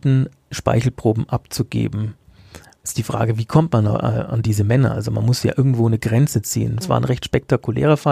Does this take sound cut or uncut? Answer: cut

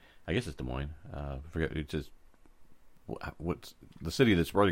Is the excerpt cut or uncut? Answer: uncut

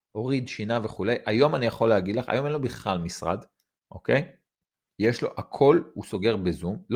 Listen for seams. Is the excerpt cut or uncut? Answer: uncut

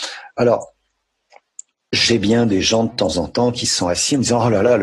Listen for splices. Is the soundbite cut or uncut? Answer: uncut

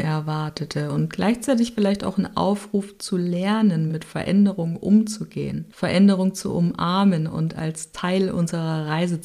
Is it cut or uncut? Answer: uncut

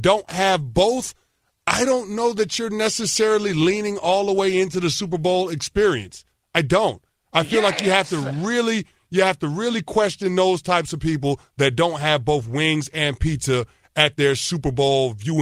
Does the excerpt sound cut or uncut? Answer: uncut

